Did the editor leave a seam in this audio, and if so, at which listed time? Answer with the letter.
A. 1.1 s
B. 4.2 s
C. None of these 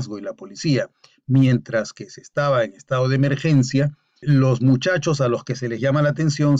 B